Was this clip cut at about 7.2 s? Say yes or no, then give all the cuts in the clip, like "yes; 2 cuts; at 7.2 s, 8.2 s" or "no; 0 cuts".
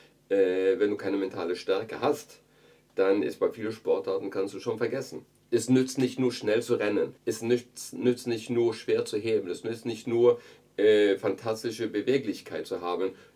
yes; 1 cut; at 7.2 s